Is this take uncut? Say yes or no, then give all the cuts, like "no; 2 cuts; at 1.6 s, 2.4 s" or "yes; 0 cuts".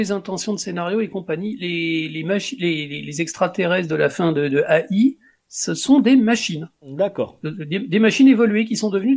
yes; 0 cuts